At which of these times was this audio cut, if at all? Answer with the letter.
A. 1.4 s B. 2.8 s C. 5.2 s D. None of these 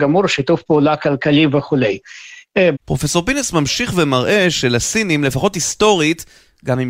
B